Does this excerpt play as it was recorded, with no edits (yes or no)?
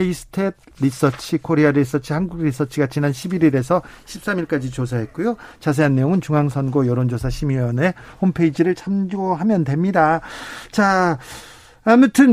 yes